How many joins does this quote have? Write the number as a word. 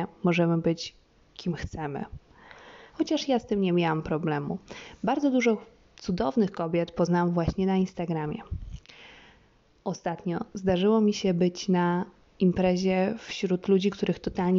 one